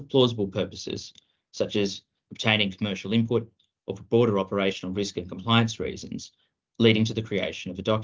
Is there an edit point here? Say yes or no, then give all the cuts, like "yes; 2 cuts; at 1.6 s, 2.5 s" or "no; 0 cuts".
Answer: no; 0 cuts